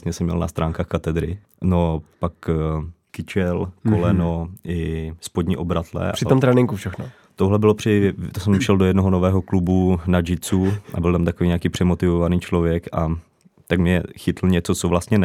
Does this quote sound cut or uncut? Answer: cut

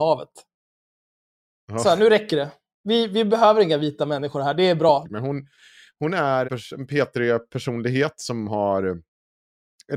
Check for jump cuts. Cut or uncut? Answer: cut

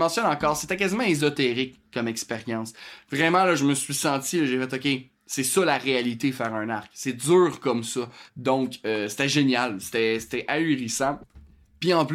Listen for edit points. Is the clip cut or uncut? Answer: cut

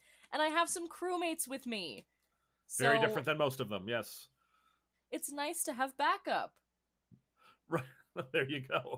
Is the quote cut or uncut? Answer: cut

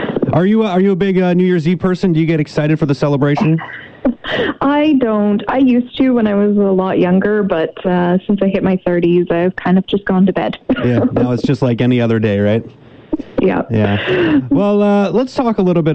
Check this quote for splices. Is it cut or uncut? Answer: uncut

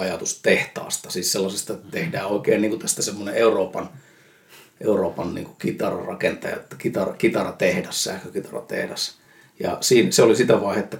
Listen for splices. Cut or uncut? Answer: uncut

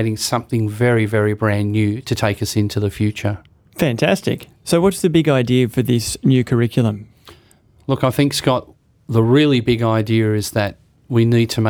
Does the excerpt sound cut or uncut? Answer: uncut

